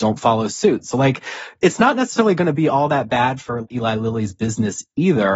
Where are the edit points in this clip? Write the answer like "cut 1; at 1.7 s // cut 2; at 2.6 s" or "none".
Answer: none